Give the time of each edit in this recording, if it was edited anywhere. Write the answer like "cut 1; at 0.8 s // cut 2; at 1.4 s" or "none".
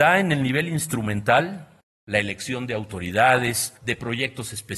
cut 1; at 3.8 s